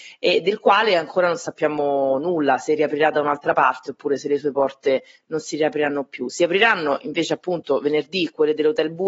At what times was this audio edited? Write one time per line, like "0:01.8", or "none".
none